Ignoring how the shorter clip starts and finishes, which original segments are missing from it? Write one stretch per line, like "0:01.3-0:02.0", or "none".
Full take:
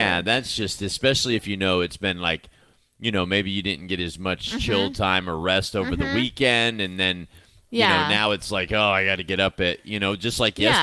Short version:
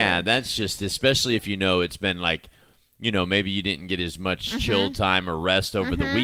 none